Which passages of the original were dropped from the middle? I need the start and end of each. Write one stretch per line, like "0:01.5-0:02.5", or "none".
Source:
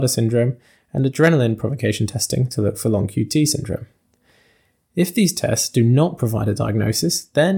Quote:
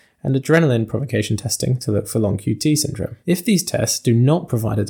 0:03.9-0:04.9